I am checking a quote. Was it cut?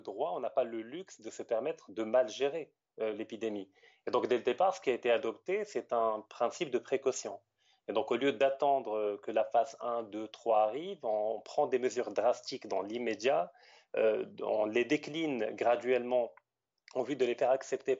no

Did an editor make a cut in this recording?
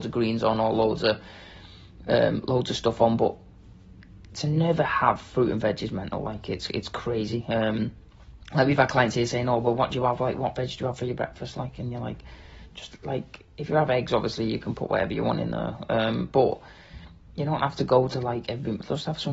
no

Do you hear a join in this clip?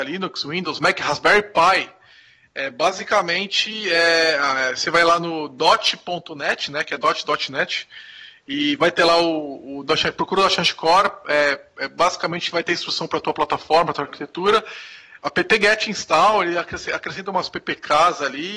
no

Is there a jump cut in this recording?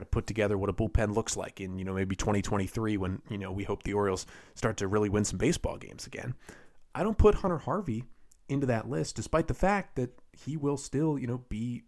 no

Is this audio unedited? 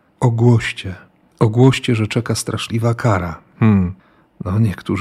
yes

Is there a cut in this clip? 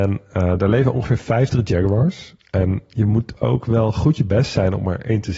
no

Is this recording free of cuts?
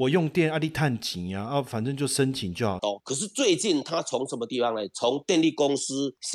no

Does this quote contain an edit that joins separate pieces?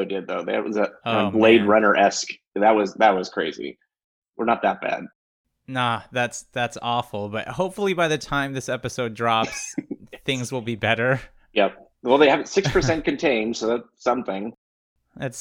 no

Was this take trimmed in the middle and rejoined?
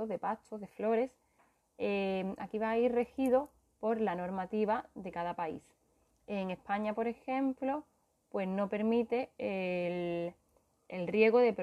no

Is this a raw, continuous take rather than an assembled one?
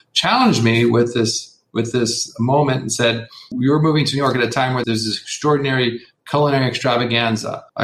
no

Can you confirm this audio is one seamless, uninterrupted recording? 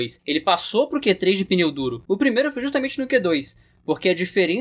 no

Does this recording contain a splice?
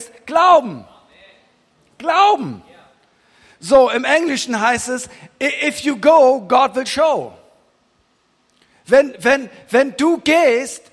no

